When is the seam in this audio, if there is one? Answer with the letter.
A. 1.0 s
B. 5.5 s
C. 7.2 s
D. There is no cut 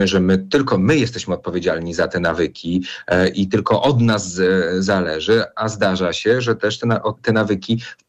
C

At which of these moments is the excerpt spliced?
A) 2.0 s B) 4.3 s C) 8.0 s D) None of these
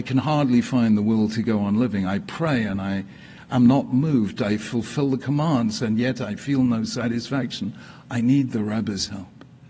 D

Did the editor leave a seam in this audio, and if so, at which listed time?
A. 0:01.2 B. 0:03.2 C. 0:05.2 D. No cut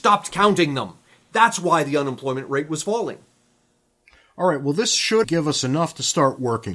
C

